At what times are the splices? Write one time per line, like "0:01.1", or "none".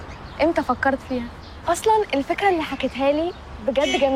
0:01.6